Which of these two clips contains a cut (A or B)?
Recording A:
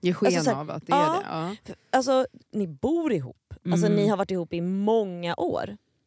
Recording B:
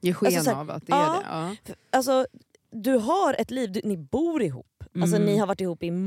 A